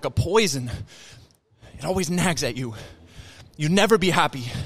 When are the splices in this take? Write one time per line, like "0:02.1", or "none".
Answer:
none